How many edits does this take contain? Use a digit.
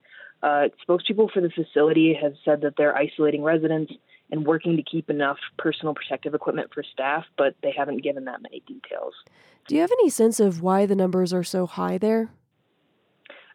0